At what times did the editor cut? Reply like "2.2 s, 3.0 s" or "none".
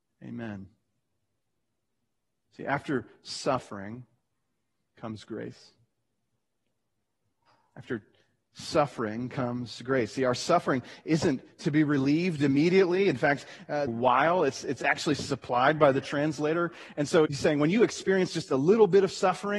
13.9 s, 17.3 s